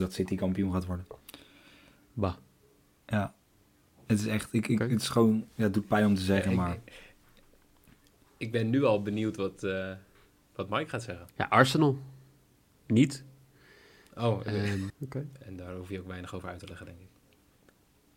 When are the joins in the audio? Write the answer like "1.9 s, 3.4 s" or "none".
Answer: 11.3 s, 14.9 s

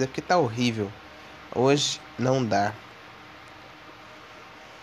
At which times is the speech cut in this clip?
none

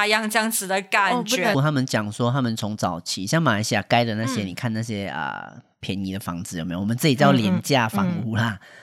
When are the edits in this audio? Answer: 1.5 s

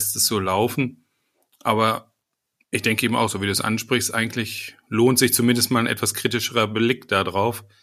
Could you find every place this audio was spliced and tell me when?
none

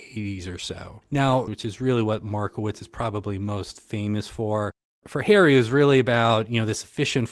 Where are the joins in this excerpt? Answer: 1.5 s

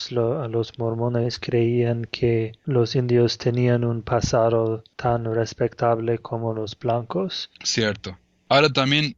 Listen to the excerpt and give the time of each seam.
7.6 s

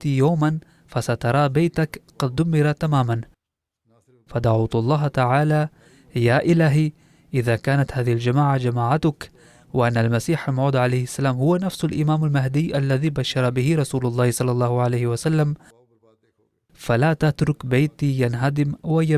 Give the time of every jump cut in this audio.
none

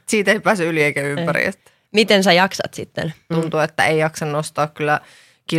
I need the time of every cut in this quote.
3.3 s

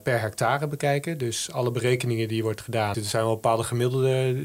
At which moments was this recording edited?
2.9 s

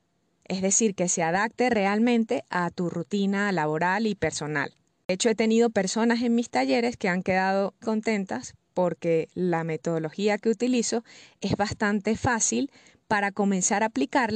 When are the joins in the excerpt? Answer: 5.0 s, 7.8 s

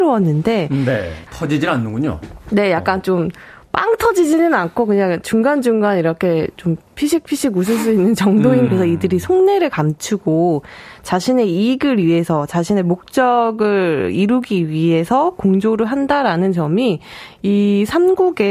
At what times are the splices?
1.3 s, 8.7 s

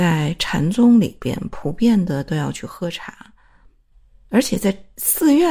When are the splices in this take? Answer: none

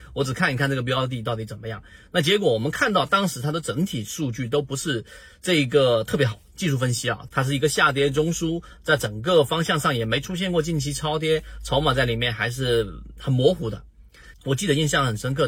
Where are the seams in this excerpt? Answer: 7.3 s, 14.3 s

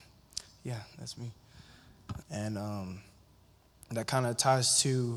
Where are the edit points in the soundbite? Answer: 2.2 s

